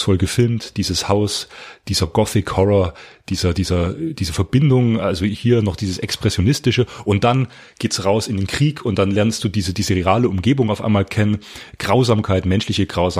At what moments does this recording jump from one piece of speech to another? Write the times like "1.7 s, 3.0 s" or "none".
none